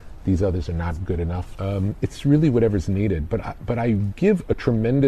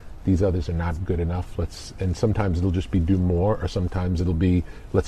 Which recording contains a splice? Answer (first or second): first